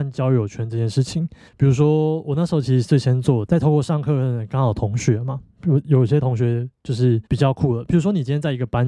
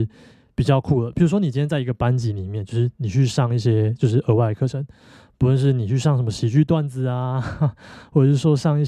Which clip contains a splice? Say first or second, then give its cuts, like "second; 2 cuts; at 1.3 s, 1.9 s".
first; 3 cuts; at 1.5 s, 3.5 s, 7.3 s